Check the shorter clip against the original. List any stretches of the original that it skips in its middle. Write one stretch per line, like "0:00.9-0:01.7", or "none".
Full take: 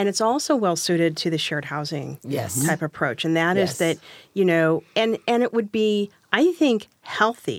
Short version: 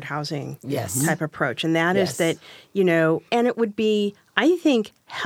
0:04.9-0:05.2